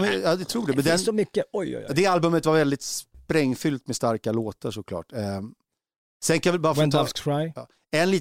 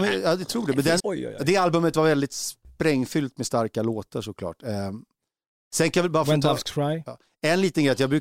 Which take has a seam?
second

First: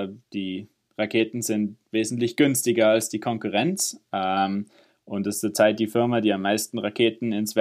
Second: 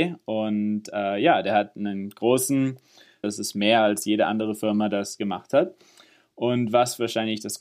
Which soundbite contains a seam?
second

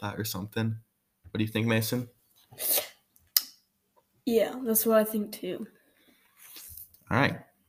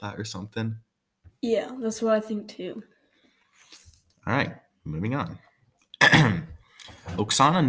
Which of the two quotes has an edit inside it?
second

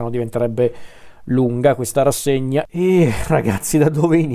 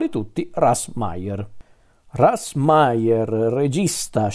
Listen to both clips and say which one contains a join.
first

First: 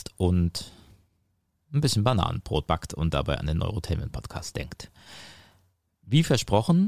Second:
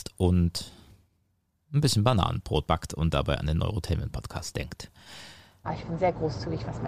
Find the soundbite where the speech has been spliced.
second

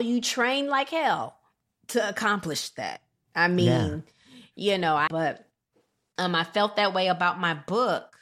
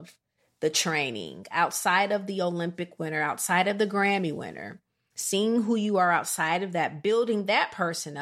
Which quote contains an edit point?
first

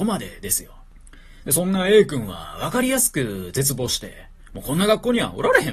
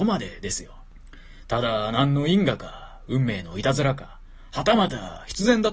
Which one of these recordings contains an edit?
second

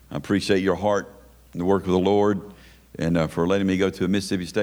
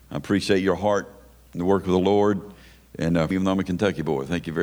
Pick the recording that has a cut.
second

